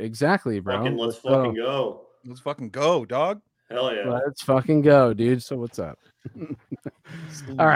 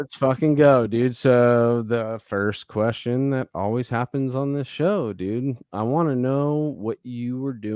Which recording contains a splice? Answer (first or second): first